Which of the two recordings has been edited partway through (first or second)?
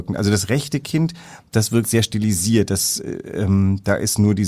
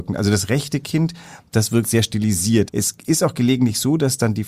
second